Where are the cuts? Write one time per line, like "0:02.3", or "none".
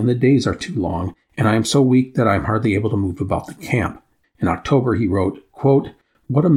0:04.2